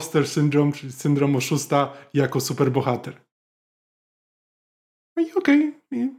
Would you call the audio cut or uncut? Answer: uncut